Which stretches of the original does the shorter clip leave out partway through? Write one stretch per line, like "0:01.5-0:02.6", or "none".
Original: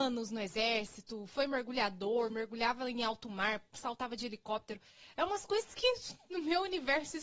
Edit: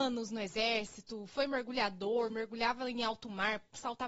none